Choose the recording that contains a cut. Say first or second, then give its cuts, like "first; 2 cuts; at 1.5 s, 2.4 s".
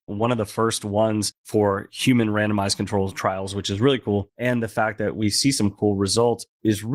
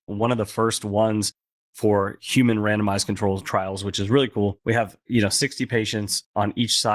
first; 2 cuts; at 1.4 s, 4.3 s